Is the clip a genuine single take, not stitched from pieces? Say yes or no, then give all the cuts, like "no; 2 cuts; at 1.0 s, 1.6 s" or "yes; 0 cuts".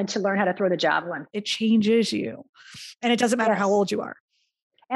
no; 1 cut; at 1.3 s